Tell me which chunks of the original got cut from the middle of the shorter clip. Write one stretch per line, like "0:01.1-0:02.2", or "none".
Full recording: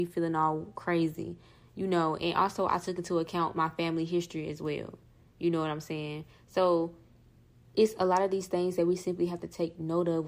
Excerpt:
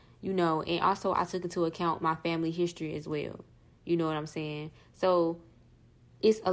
none

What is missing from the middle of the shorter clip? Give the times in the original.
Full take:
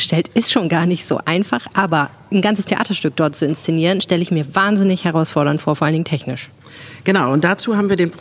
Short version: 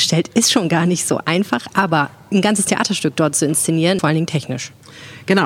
0:04.0-0:05.8

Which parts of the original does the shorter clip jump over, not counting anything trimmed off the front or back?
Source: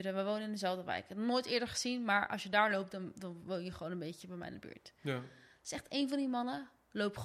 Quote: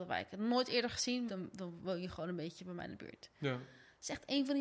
0:02.0-0:02.9

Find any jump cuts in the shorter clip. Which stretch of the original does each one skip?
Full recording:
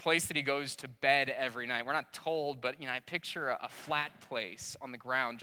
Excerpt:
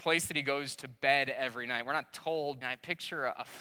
0:02.6-0:02.8

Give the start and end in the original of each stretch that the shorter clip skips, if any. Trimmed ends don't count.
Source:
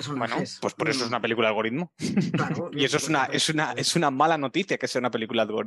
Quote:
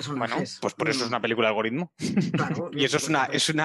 none

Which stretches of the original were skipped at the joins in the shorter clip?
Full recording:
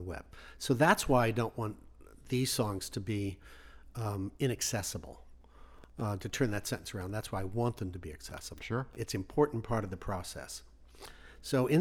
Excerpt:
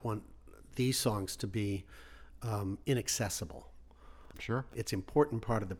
0:05.9-0:08.6

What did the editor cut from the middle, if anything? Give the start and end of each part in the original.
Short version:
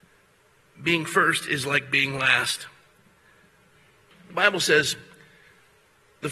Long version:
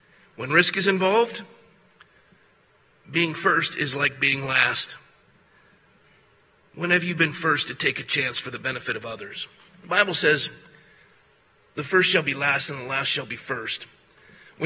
0:06.4-0:09.6

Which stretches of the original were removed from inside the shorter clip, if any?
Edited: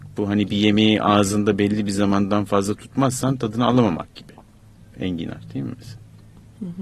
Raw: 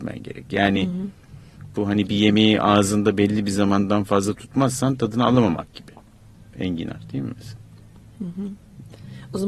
none

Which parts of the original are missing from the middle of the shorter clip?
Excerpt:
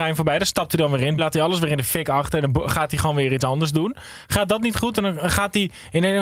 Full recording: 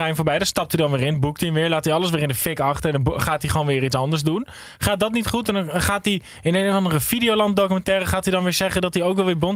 0:01.2-0:01.7

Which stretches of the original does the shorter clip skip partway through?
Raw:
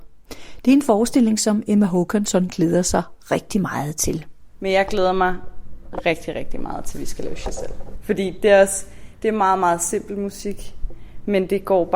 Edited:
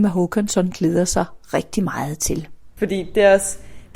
0:04.5-0:08.0

